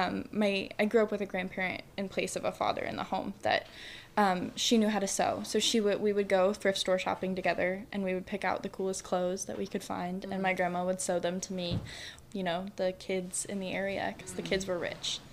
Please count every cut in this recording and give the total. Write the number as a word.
one